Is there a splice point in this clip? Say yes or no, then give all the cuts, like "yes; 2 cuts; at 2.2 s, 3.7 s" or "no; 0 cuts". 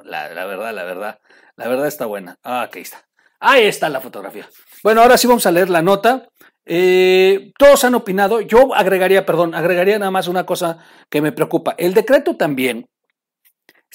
no; 0 cuts